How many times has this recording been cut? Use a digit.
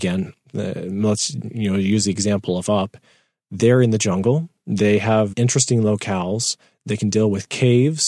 1